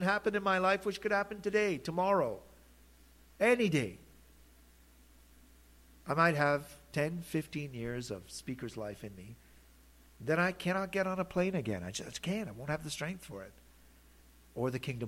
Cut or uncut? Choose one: uncut